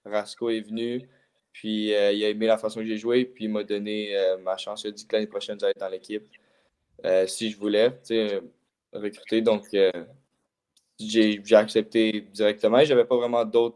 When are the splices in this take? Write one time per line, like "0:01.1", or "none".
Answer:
none